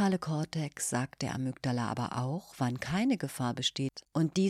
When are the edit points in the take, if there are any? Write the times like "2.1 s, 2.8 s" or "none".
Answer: none